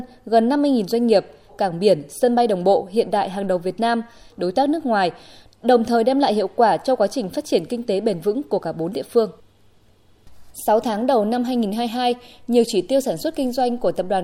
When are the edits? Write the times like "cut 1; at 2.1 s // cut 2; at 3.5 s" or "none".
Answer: cut 1; at 1.5 s // cut 2; at 4.3 s